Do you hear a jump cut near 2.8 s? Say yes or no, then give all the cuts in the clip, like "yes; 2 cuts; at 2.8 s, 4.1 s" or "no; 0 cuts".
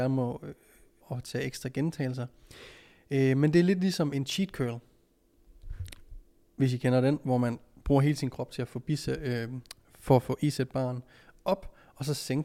no; 1 cut; at 1.0 s